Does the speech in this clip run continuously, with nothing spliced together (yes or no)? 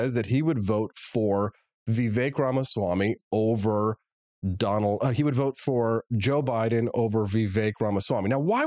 yes